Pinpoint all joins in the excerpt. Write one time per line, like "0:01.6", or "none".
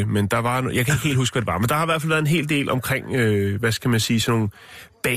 none